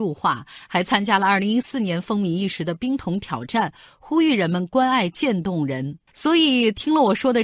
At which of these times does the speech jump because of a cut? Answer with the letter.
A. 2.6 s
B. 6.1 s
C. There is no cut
B